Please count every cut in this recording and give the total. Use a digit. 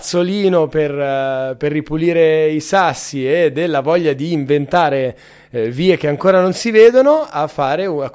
0